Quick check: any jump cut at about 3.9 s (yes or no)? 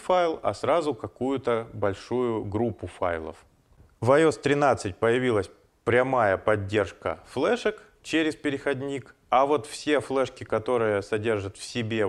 no